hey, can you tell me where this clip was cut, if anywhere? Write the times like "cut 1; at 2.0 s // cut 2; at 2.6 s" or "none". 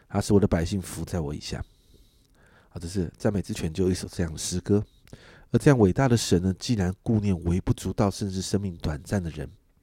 none